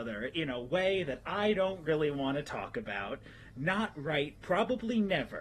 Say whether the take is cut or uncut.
cut